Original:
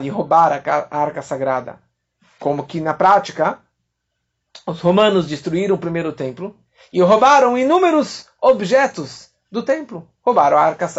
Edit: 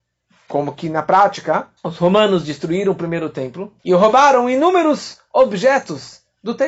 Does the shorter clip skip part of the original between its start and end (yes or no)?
yes